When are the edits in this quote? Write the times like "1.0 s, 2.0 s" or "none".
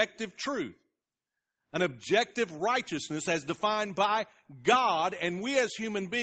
none